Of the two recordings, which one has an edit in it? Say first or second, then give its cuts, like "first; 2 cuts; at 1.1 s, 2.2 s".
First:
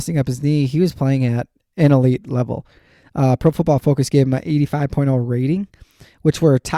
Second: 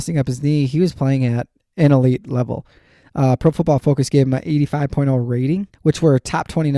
second; 1 cut; at 5.7 s